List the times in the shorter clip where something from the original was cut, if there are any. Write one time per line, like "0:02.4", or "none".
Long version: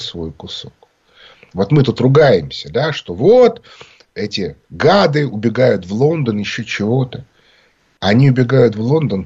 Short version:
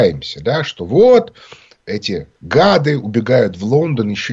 none